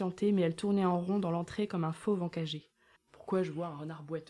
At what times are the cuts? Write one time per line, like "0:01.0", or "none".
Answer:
0:03.0